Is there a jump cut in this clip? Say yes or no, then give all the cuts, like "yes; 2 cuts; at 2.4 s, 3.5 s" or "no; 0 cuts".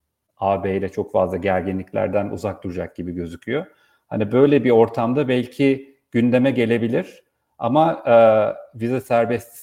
no; 0 cuts